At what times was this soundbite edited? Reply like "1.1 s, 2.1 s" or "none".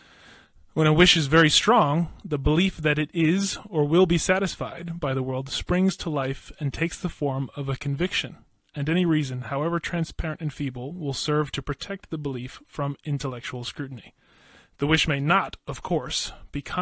none